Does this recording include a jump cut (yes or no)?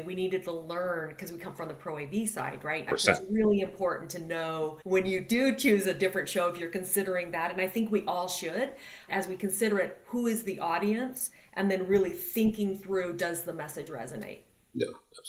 yes